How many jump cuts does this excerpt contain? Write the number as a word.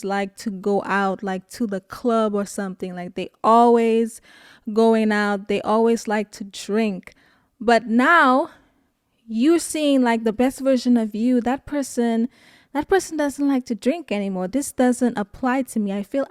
one